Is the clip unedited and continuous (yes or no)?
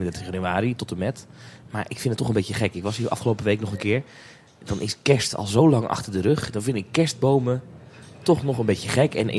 yes